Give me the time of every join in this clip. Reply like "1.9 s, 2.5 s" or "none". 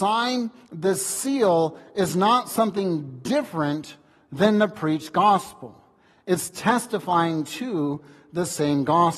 none